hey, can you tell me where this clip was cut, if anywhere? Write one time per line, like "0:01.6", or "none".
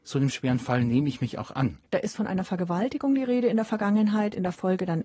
0:01.9